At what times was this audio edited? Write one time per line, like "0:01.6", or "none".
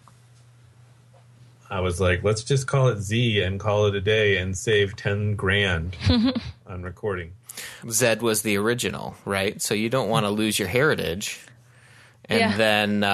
0:07.8